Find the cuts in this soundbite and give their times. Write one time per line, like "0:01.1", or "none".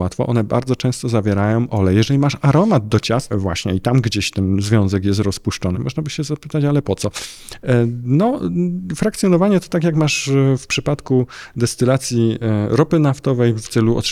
0:03.3
0:05.7